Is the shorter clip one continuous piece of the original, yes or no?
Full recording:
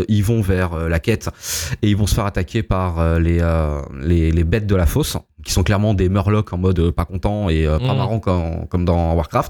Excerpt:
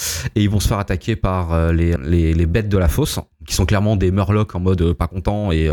no